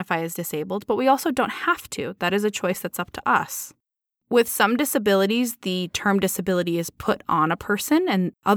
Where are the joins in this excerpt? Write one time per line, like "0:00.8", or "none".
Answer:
0:04.1